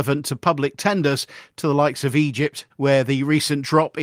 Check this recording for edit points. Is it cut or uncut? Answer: cut